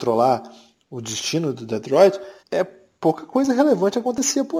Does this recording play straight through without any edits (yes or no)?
no